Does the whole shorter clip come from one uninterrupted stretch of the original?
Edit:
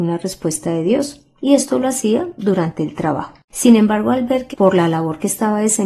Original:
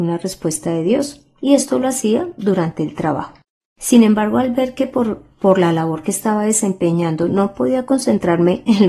no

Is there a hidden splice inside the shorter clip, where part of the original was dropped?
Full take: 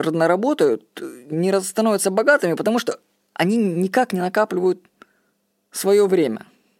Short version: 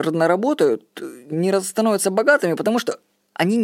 no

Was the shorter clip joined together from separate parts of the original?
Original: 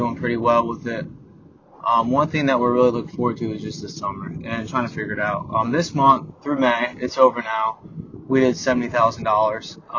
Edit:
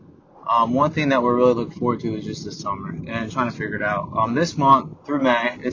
no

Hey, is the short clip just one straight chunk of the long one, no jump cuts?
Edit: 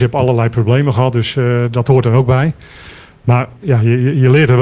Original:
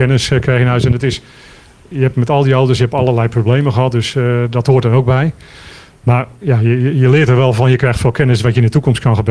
yes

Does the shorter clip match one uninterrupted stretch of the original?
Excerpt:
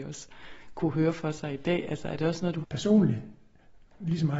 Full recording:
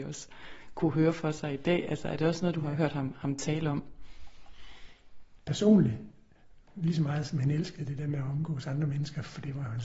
no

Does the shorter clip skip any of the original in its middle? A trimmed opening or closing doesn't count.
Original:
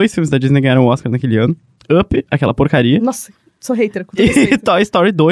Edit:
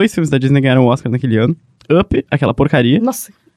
no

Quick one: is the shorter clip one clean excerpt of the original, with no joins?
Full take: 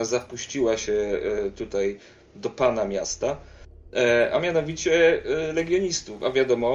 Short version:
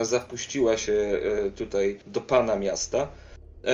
no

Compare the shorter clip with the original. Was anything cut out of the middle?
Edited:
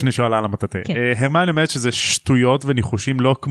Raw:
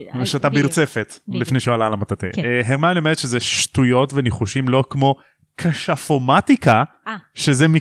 no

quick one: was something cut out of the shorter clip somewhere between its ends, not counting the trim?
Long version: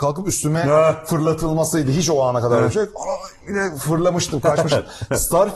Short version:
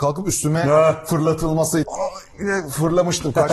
yes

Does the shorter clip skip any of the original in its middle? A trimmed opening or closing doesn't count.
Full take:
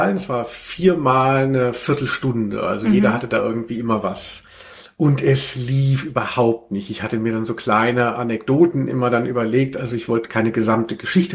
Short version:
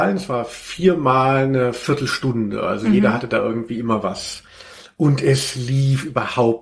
no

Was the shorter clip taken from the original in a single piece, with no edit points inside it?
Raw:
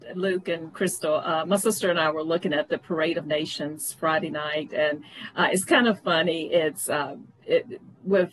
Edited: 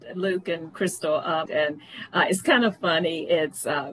no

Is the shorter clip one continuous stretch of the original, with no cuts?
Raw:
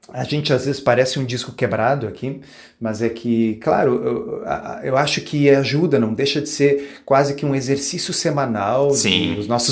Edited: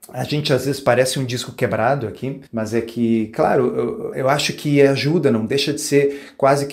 no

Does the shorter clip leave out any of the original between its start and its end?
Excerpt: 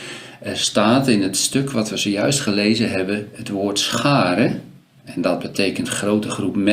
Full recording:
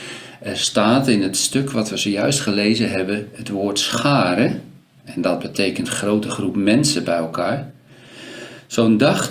no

